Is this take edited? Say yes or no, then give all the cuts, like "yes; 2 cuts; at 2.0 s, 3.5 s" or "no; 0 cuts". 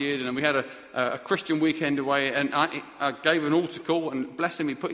yes; 1 cut; at 3.0 s